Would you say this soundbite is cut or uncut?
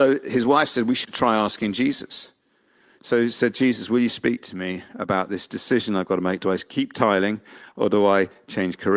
uncut